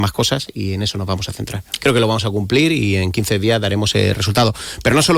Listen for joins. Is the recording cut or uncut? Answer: cut